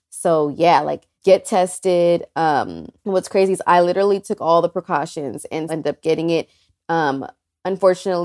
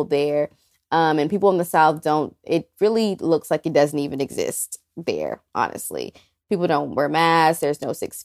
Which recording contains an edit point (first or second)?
first